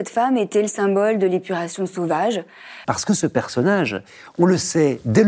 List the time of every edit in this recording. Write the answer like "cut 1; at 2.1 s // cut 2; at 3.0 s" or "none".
cut 1; at 2.8 s